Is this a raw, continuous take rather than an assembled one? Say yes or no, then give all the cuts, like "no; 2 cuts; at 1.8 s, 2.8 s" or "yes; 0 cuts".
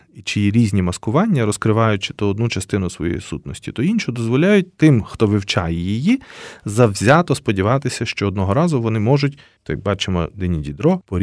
no; 1 cut; at 9.6 s